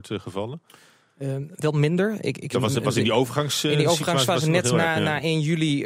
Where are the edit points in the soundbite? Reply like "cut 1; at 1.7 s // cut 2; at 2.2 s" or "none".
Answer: cut 1; at 2.5 s